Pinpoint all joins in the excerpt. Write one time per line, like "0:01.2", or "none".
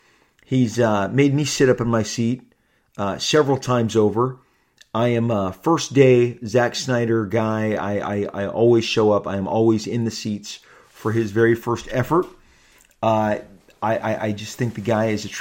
none